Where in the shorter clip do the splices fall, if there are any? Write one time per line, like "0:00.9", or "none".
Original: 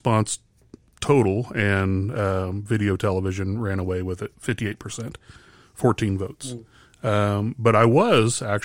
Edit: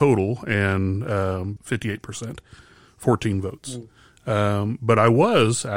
0:01.6